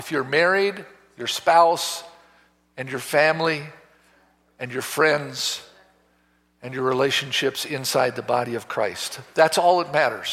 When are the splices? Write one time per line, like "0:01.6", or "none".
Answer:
none